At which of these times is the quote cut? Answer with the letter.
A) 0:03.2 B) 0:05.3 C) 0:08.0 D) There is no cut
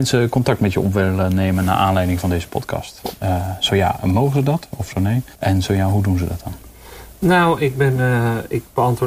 B